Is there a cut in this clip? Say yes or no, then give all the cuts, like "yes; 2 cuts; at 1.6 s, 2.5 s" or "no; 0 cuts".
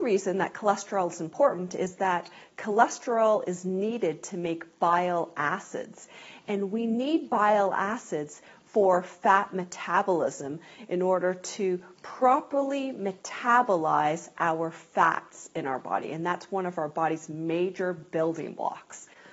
no; 0 cuts